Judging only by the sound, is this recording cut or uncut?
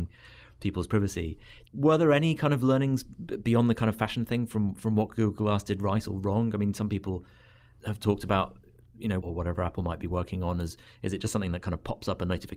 cut